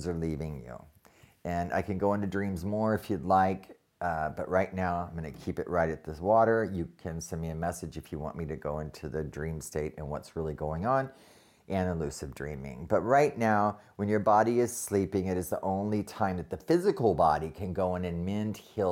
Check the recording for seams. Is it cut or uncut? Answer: uncut